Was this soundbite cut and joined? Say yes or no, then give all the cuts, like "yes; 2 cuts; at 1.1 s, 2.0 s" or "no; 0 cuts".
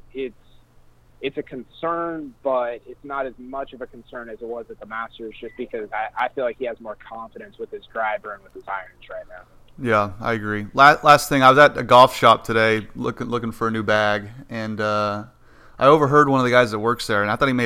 no; 0 cuts